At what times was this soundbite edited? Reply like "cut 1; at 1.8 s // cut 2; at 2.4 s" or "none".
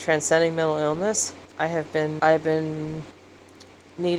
cut 1; at 2.2 s

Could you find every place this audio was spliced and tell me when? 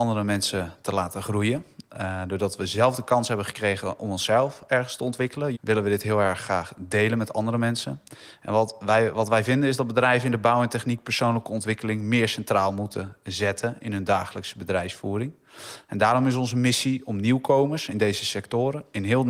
cut 1; at 5.5 s

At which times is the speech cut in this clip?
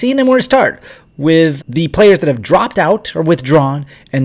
cut 1; at 1.6 s

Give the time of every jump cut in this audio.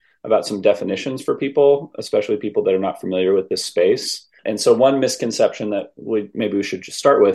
cut 1; at 4.4 s

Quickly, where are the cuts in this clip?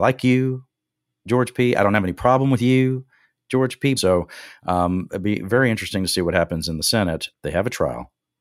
cut 1; at 4.0 s // cut 2; at 7.3 s

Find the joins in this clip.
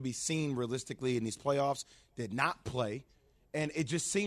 none

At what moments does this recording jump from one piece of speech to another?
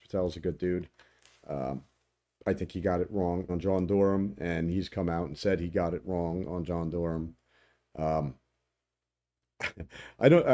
cut 1; at 3.5 s

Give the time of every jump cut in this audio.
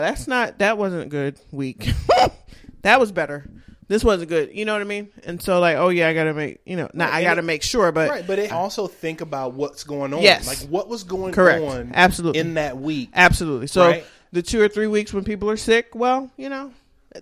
cut 1; at 8.5 s

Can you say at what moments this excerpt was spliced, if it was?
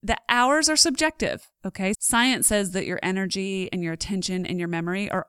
cut 1; at 1.9 s

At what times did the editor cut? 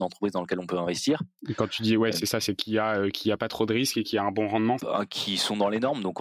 cut 1; at 1.4 s // cut 2; at 4.8 s

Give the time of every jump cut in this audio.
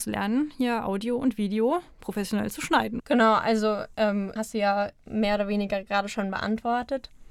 cut 1; at 3.0 s // cut 2; at 4.4 s

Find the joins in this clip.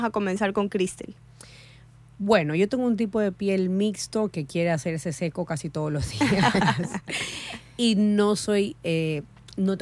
none

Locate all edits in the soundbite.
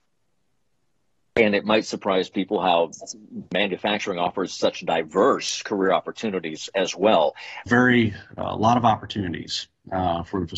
cut 1; at 7.7 s

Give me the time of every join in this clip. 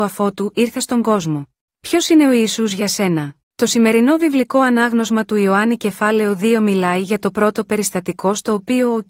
cut 1; at 1.7 s // cut 2; at 3.4 s

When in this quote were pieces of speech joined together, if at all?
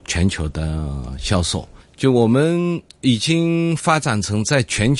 cut 1; at 1.8 s

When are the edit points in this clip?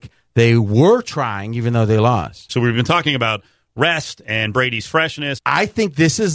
cut 1; at 2.5 s // cut 2; at 5.4 s

